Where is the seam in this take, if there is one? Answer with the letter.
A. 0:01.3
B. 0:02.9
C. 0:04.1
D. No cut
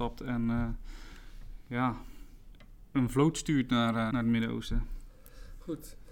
C